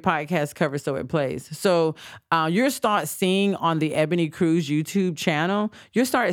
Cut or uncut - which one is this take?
uncut